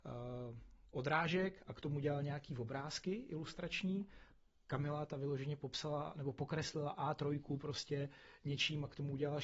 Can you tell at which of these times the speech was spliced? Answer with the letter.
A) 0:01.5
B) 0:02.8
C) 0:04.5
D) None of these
D